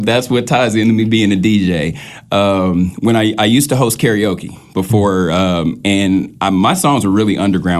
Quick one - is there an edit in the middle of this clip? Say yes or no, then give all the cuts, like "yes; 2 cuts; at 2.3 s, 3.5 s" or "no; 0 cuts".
no; 0 cuts